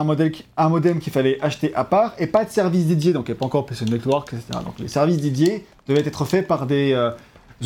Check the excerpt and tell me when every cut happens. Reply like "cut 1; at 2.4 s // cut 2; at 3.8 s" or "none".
none